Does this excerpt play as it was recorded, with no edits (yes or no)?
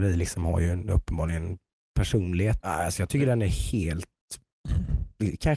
no